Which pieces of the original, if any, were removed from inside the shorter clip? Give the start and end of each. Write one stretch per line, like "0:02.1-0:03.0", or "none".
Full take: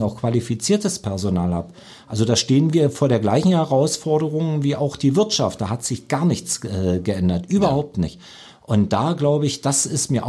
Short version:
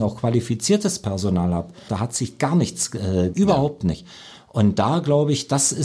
0:01.9-0:05.6
0:07.0-0:07.5